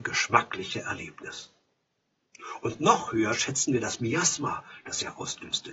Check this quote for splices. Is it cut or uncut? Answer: uncut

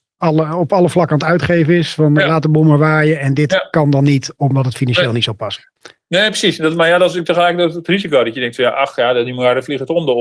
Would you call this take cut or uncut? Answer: uncut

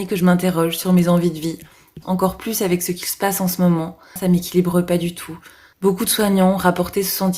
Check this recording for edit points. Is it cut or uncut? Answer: cut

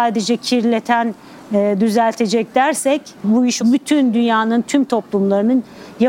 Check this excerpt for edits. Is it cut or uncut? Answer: cut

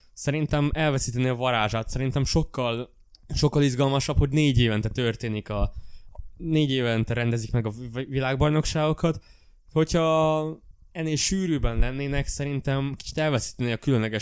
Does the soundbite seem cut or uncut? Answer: uncut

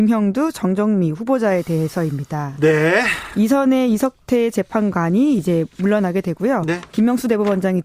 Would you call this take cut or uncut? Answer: uncut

